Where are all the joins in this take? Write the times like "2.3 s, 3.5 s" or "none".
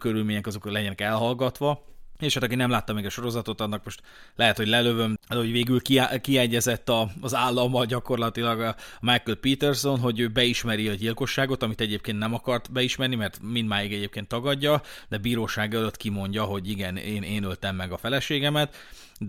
5.2 s